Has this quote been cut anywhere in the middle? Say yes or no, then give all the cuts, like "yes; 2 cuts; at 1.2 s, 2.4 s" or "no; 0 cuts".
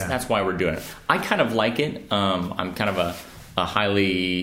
no; 0 cuts